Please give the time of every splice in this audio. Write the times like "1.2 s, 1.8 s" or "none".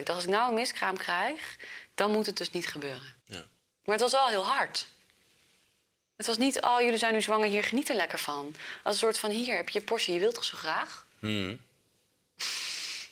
3.2 s